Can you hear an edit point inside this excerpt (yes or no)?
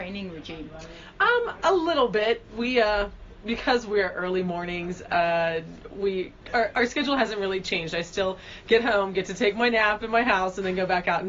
no